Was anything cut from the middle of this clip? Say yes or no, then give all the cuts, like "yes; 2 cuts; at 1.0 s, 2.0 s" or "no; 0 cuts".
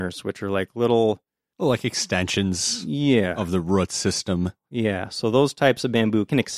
no; 0 cuts